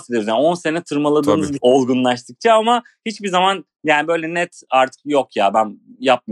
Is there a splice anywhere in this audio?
yes; 1 cut; at 1.6 s

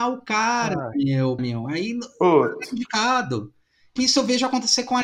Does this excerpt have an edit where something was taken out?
yes; 2 cuts; at 1.4 s, 4.0 s

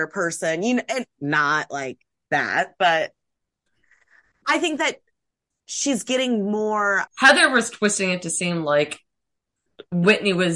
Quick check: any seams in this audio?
yes; 1 cut; at 7.1 s

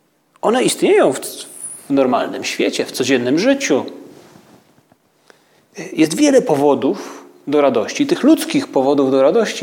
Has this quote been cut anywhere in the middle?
no; 0 cuts

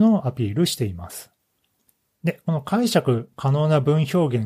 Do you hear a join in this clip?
no; 0 cuts

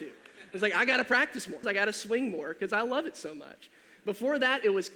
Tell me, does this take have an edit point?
yes; 1 cut; at 1.6 s

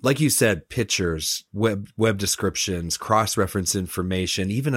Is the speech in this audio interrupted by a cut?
no; 0 cuts

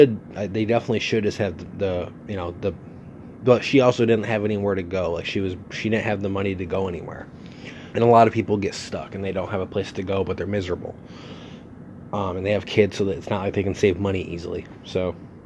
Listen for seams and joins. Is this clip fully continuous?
no; 1 cut; at 7.9 s

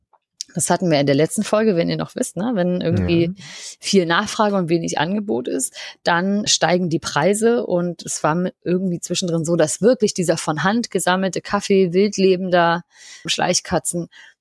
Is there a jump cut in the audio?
yes; 2 cuts; at 6.5 s, 13.3 s

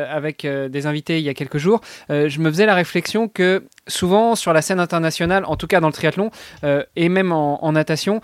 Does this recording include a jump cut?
no; 0 cuts

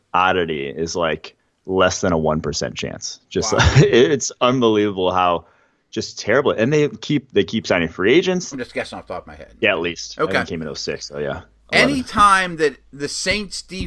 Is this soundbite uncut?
no; 1 cut; at 8.5 s

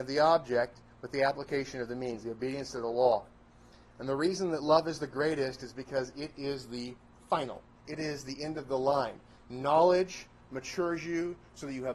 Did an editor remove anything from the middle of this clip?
yes; 1 cut; at 7.8 s

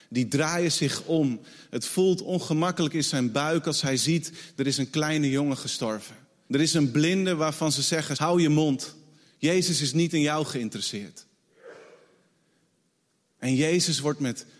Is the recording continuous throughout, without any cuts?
no; 2 cuts; at 6.5 s, 8.1 s

